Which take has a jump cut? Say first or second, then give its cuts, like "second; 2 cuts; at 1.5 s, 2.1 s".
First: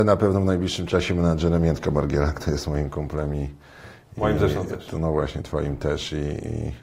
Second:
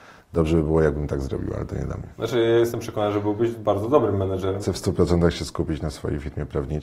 second; 1 cut; at 4.6 s